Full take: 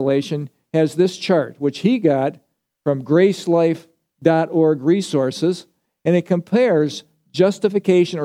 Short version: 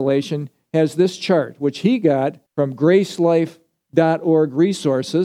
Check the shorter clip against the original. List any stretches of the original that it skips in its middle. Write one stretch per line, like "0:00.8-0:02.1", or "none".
0:02.5-0:02.7